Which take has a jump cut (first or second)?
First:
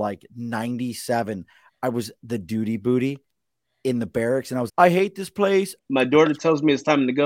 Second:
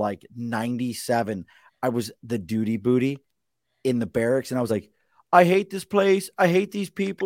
first